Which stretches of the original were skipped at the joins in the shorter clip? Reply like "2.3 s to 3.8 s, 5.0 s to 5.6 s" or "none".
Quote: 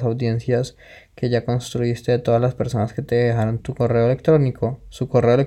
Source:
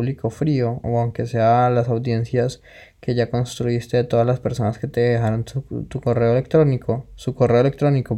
5.4 s to 5.9 s